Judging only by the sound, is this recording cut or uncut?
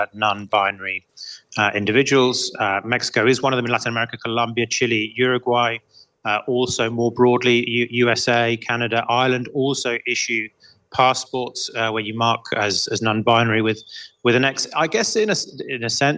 uncut